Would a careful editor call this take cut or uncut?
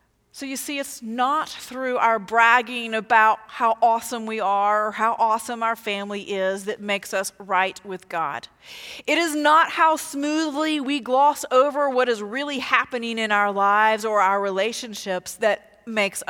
uncut